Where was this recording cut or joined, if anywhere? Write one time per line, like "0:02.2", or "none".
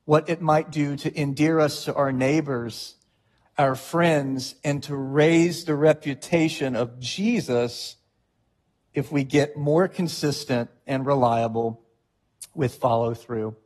0:03.5